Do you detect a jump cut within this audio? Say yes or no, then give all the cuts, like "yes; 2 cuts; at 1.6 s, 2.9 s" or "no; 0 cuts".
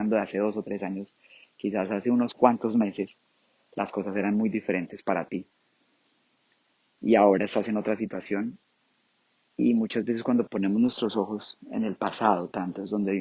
no; 0 cuts